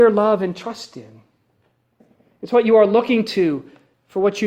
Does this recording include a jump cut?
no; 0 cuts

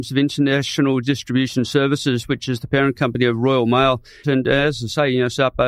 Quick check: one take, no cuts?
no; 1 cut; at 4.2 s

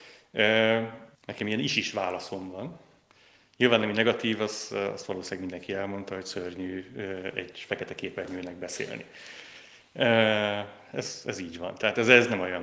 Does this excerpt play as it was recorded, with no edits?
no; 1 cut; at 1.1 s

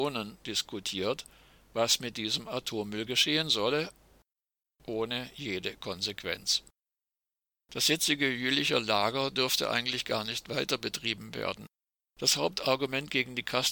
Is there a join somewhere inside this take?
yes; 2 cuts; at 7.6 s, 12.0 s

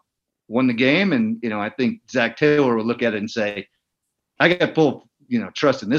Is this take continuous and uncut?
yes; 0 cuts

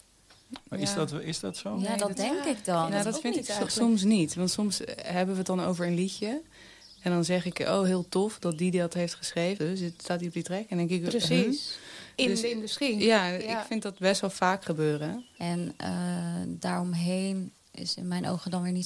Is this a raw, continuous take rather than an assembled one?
no; 2 cuts; at 9.6 s, 15.4 s

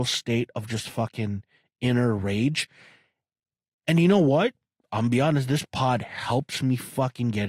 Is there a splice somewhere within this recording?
no; 0 cuts

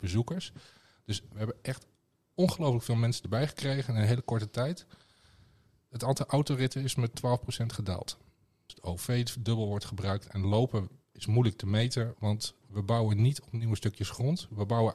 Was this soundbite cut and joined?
yes; 2 cuts; at 8.7 s, 12.1 s

